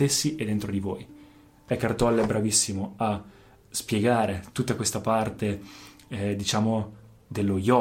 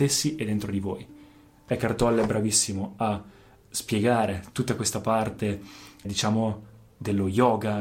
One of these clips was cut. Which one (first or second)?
second